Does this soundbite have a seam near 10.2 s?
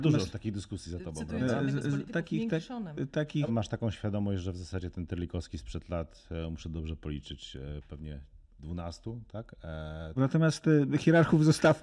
yes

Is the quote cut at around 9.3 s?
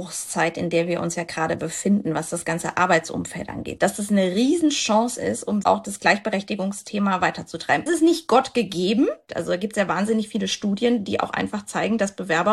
yes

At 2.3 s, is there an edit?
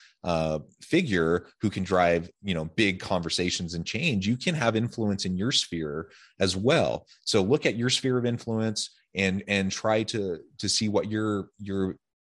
yes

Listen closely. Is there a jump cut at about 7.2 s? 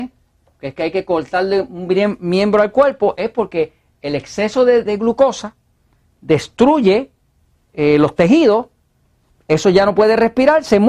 no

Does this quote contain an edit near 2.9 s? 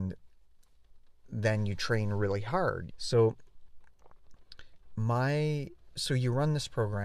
yes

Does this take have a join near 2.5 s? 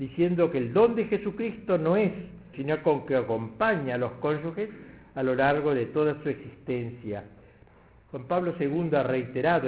yes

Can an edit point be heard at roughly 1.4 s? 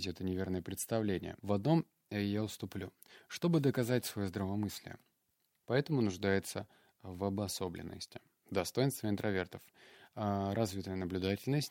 yes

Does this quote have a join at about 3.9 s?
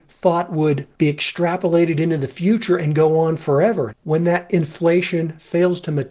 yes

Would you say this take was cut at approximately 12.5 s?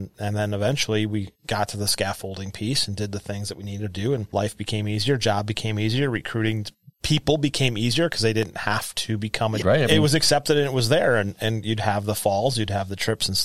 no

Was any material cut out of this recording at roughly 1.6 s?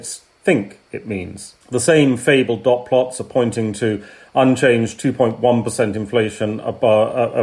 yes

